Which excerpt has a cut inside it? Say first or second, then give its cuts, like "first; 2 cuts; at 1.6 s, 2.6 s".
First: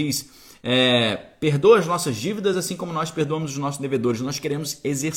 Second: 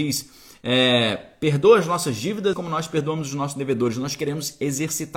second; 1 cut; at 2.5 s